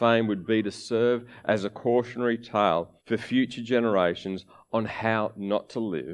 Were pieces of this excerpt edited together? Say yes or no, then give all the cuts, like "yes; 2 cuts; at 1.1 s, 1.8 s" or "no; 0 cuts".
yes; 1 cut; at 3.0 s